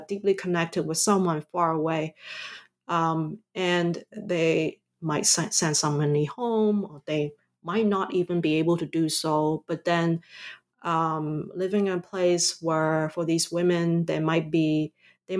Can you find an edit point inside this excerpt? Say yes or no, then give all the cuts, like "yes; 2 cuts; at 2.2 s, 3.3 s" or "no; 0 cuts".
no; 0 cuts